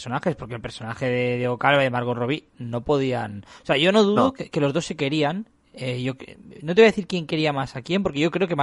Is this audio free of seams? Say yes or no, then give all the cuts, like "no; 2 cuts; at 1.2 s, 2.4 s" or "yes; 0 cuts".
yes; 0 cuts